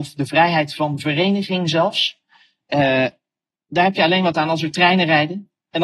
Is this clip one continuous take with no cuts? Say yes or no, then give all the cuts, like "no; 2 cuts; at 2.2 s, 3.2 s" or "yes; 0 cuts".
yes; 0 cuts